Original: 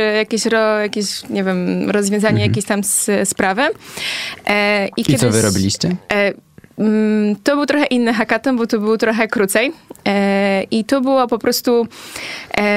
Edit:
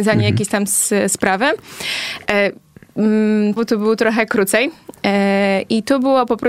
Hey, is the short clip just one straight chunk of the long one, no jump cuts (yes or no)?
no